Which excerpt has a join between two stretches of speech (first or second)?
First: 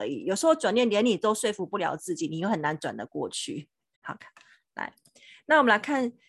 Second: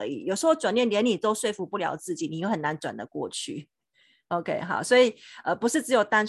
first